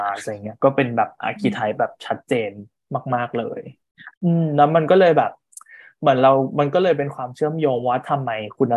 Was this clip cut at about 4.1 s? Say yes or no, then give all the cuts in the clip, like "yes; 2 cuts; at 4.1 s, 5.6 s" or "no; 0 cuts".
yes; 1 cut; at 4.1 s